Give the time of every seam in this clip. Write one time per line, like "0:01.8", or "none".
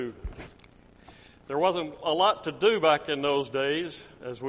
none